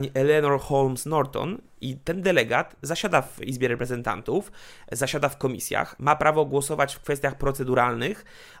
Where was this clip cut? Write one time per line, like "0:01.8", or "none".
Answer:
none